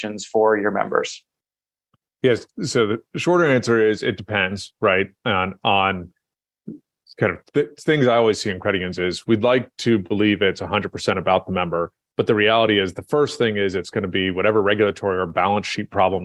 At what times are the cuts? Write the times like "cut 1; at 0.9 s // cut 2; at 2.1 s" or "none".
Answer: none

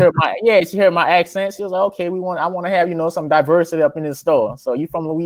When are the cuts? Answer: none

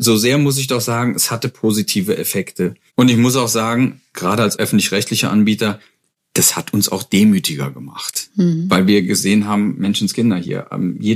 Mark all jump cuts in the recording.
cut 1; at 2.9 s

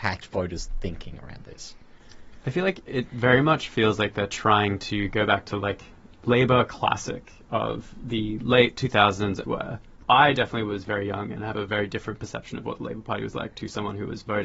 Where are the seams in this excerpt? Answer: cut 1; at 9.4 s

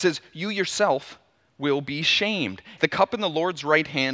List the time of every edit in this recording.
cut 1; at 2.8 s

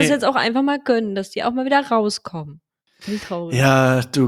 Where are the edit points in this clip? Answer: cut 1; at 2.9 s

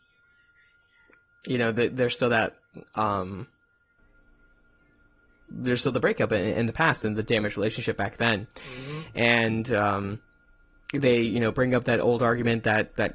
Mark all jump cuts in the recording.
none

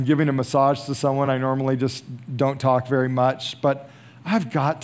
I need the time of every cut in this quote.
none

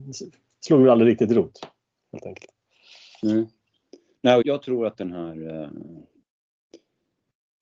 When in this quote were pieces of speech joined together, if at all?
cut 1; at 4.4 s

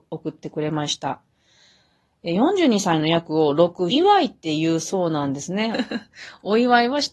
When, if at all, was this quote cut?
cut 1; at 3.9 s // cut 2; at 5.7 s

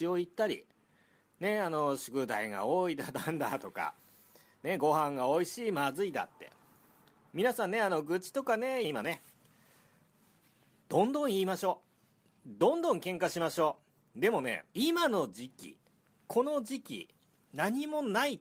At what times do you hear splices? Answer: cut 1; at 8.8 s // cut 2; at 14.7 s

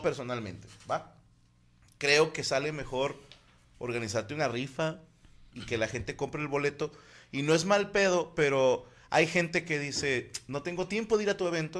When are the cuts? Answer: cut 1; at 5.5 s

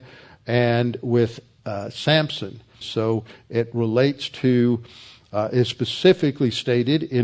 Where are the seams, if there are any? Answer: cut 1; at 2.8 s

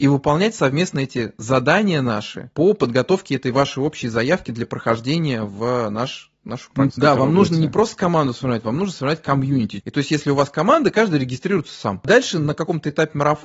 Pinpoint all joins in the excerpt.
cut 1; at 6.9 s // cut 2; at 9.8 s

